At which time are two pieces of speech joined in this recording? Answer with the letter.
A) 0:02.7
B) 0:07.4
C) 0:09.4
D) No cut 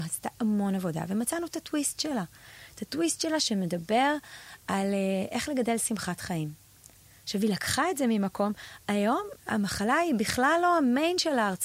C